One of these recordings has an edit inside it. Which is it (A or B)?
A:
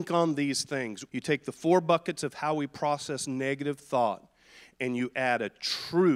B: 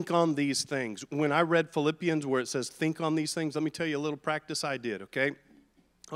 A